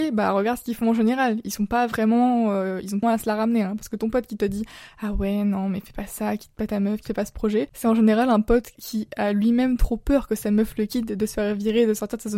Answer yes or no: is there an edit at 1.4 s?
no